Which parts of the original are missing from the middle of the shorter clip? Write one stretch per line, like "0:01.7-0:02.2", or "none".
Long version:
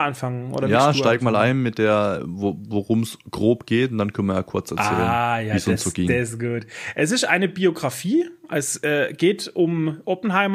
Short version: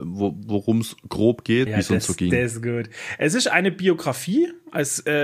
0:03.9-0:05.4